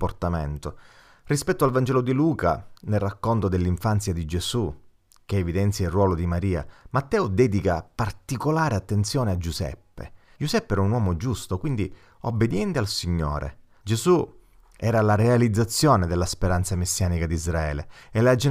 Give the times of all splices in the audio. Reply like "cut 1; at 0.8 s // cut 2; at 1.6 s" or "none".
cut 1; at 10.4 s // cut 2; at 13.8 s